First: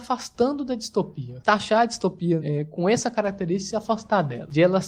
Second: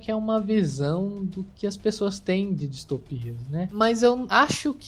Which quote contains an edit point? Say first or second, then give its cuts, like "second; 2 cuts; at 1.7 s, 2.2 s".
first; 1 cut; at 2.4 s